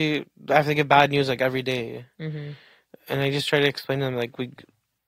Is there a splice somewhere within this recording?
no; 0 cuts

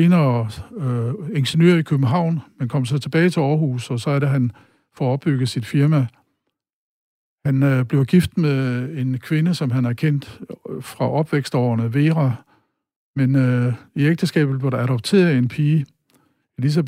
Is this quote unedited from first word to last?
no; 1 cut; at 13.0 s

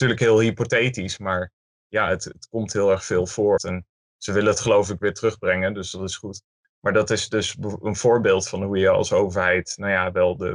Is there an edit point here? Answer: yes; 1 cut; at 3.6 s

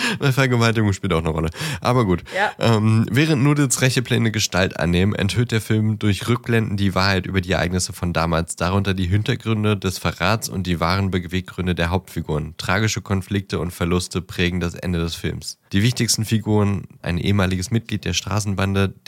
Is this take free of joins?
no; 2 cuts; at 15.7 s, 17.0 s

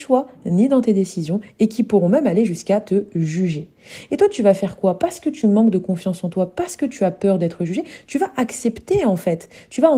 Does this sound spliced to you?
no; 0 cuts

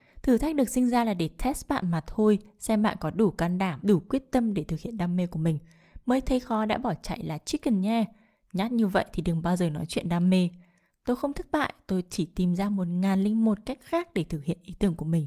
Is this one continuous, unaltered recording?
no; 1 cut; at 3.8 s

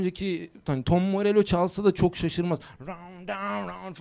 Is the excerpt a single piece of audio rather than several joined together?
yes; 0 cuts

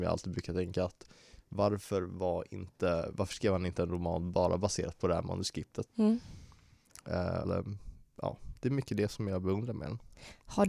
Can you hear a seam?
yes; 2 cuts; at 5.9 s, 7.4 s

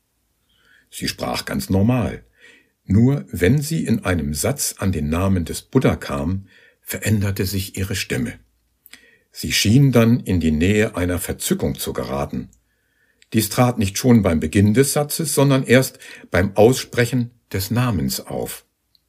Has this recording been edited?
no; 0 cuts

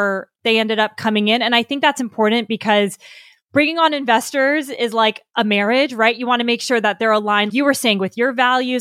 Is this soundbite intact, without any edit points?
no; 1 cut; at 7.5 s

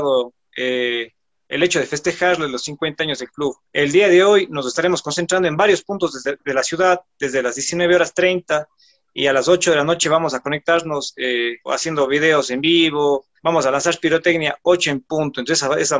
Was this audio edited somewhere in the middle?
yes; 3 cuts; at 3.6 s, 11.7 s, 13.4 s

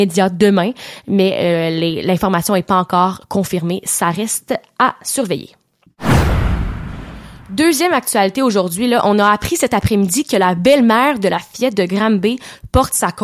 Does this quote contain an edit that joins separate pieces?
no; 0 cuts

